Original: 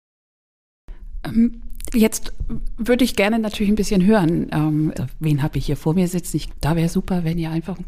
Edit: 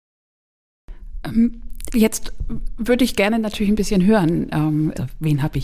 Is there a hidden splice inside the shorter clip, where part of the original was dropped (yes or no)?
no